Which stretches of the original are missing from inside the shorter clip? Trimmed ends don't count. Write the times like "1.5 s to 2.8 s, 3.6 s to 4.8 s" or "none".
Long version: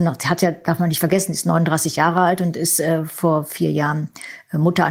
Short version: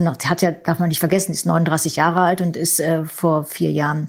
none

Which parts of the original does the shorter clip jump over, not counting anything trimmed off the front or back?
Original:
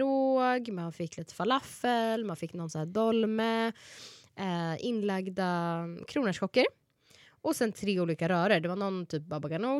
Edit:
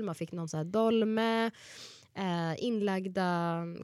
none

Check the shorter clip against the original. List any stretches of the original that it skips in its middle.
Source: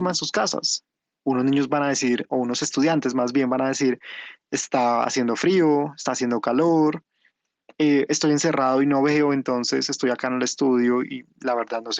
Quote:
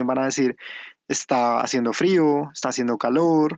none

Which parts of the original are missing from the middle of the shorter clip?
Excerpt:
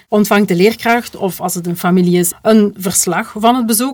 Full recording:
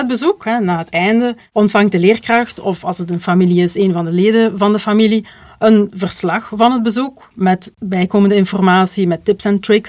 3.8 s to 5.5 s

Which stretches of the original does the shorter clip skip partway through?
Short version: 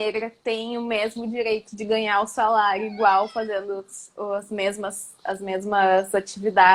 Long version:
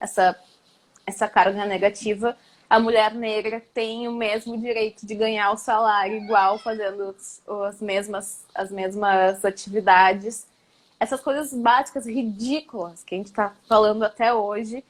none

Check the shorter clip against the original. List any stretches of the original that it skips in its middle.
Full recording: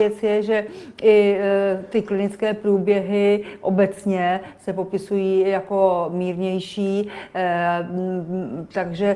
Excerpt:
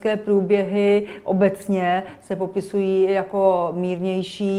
none

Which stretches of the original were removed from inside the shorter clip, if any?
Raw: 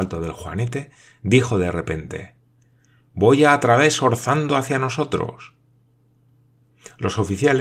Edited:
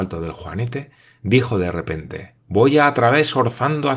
2.4 s to 3.0 s

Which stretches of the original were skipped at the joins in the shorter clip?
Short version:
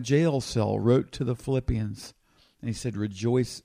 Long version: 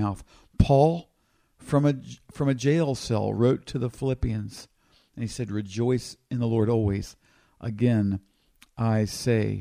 none

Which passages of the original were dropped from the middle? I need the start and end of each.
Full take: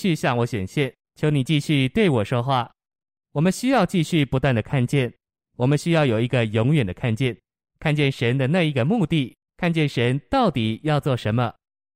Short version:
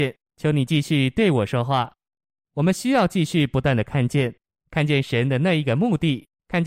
5.3 s to 7.6 s

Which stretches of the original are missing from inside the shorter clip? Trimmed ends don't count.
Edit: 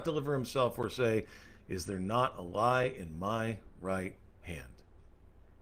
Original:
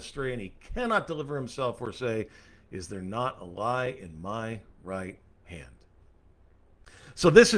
none

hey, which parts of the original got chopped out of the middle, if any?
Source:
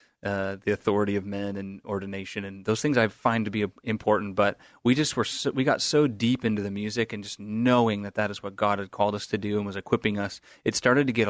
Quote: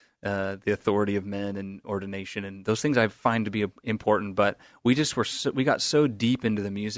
none

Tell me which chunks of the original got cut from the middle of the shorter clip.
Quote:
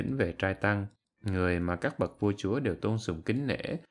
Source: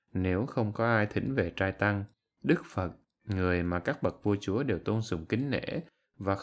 2.2 s to 3.1 s

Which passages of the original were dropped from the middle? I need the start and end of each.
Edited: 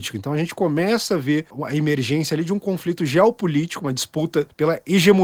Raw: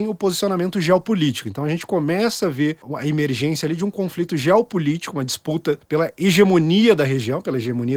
none

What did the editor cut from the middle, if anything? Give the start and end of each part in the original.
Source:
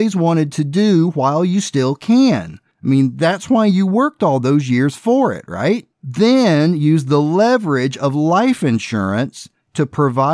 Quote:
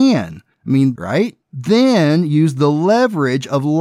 3.1 s to 5.5 s

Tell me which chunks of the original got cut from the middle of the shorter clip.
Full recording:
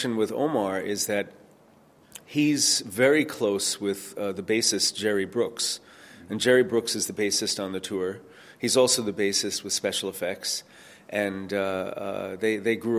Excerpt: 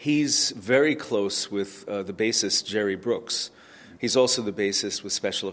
6.3 s to 8.6 s

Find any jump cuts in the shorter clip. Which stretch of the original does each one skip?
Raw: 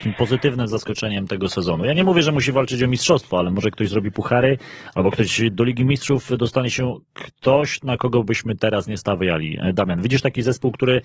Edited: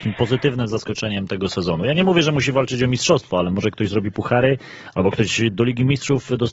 none

